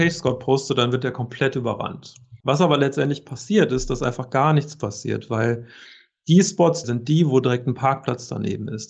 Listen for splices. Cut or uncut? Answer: cut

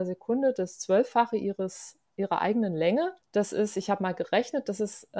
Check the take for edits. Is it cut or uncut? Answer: cut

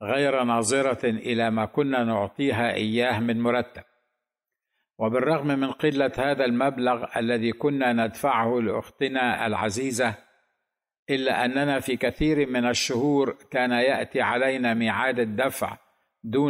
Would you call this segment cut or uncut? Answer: uncut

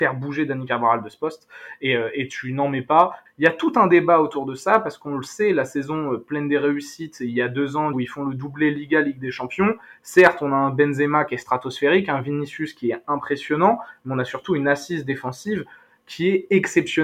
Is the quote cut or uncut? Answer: cut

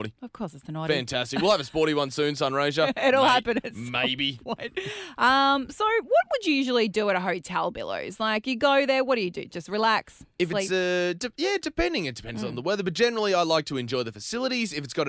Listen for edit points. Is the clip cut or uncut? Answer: uncut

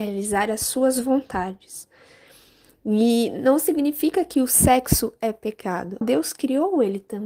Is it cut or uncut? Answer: cut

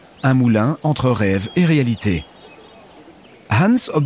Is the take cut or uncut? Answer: uncut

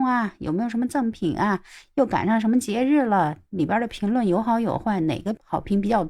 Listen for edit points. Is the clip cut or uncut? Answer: uncut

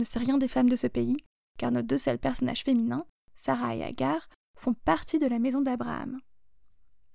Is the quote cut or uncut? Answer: uncut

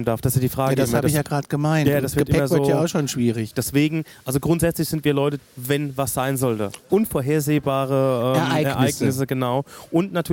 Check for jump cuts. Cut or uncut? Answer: cut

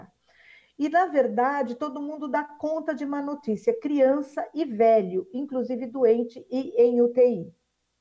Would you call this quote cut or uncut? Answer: uncut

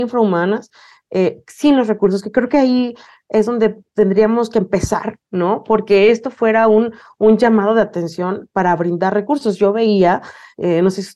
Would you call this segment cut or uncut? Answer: uncut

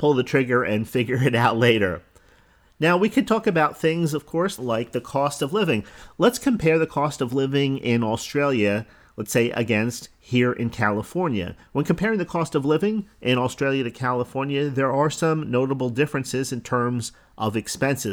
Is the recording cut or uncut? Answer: cut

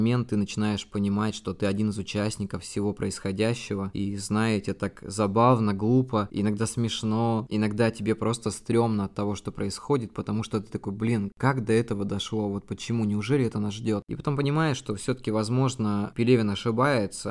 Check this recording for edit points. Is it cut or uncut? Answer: uncut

